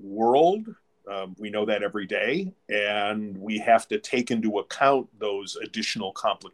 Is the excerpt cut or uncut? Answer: uncut